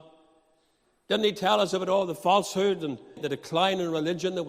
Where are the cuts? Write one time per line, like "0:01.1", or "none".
0:03.2